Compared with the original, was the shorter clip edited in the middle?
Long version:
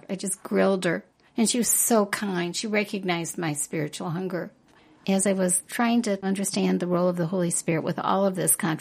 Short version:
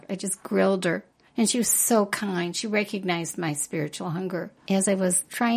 yes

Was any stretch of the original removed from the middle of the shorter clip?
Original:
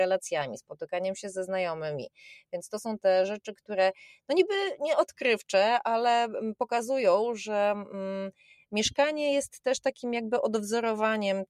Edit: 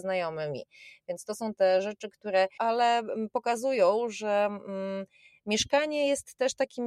yes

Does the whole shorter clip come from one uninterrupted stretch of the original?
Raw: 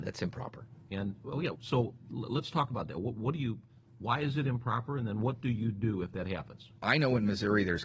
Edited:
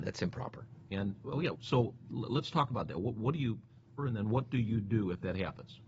no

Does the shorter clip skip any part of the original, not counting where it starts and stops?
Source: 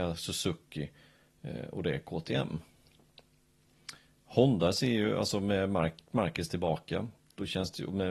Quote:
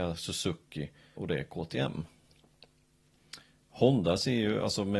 yes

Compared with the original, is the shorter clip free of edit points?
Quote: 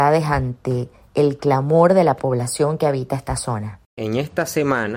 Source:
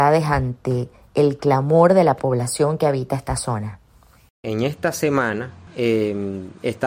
no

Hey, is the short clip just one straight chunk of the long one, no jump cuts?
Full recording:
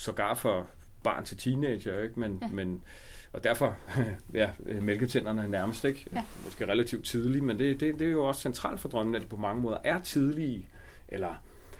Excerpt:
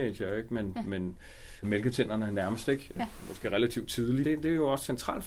no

